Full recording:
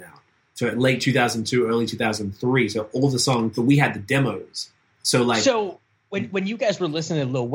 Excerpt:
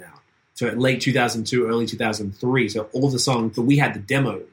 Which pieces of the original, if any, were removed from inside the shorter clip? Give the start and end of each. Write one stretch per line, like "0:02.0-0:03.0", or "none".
none